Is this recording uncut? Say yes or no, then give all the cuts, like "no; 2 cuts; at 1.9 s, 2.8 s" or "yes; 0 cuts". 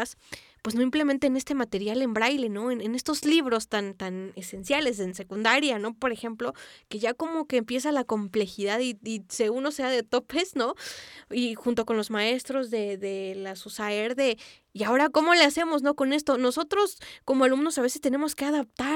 yes; 0 cuts